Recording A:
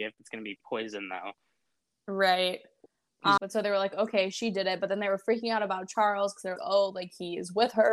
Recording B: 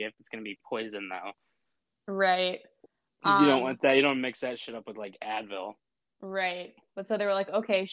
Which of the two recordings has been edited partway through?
A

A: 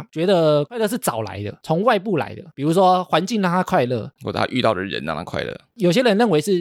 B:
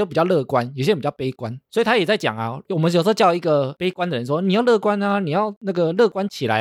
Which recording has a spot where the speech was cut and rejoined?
A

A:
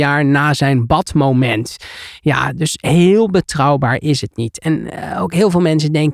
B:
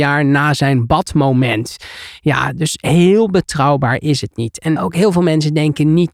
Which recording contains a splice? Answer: B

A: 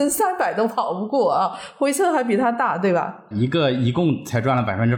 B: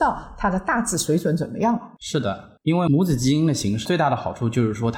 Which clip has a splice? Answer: A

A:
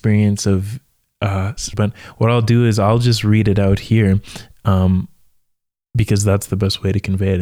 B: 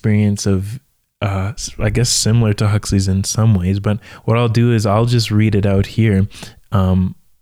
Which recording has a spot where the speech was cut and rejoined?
A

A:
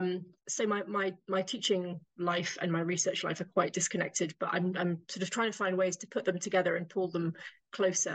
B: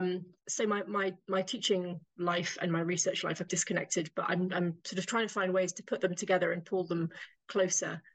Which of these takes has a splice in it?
B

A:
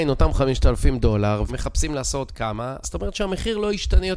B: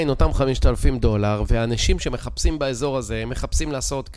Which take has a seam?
A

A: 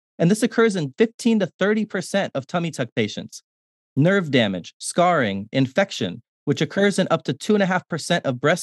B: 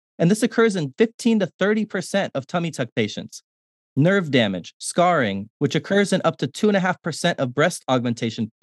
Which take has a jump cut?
B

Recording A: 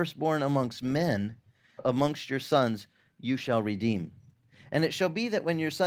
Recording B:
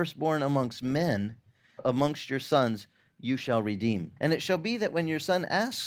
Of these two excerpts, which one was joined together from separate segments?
B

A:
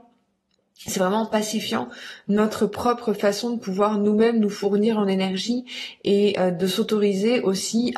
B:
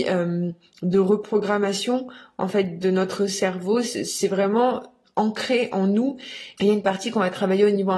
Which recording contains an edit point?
B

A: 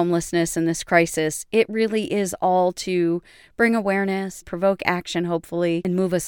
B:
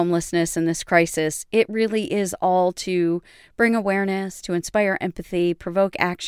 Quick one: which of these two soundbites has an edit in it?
A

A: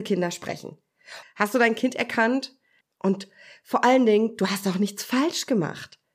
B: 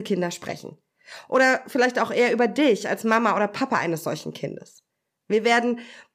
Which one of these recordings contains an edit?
A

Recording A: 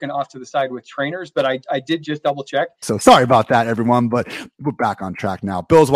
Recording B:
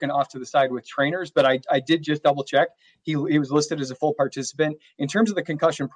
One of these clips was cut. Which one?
A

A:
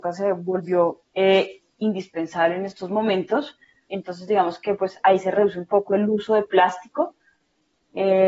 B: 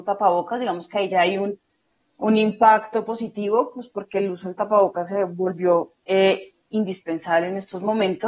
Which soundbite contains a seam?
A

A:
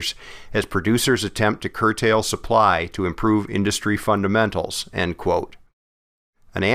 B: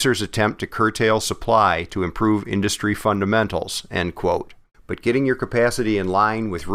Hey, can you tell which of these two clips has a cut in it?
B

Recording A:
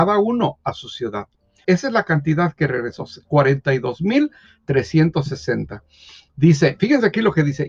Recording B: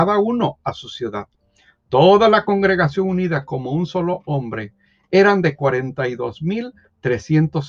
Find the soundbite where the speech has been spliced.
A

